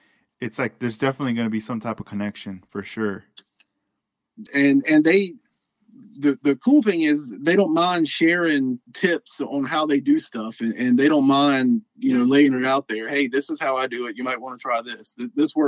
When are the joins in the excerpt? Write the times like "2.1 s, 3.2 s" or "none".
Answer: 4.5 s, 8.8 s